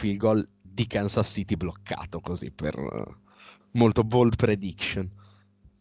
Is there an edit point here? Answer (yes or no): yes